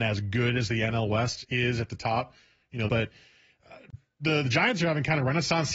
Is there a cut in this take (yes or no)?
yes